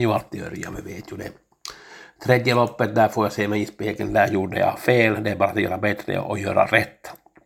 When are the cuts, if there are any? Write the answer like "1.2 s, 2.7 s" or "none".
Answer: none